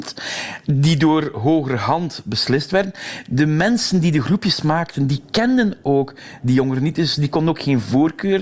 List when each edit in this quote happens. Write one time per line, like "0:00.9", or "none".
none